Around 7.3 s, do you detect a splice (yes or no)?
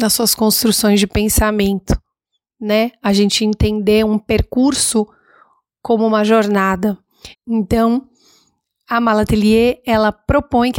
yes